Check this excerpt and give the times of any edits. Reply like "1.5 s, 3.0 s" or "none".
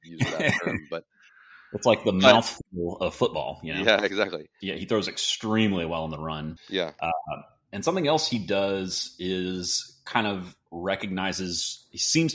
4.6 s, 6.6 s